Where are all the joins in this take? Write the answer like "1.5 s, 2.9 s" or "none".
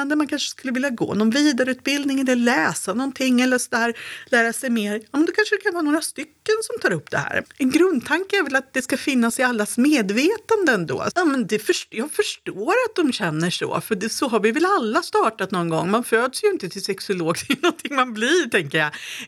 7.4 s, 11.1 s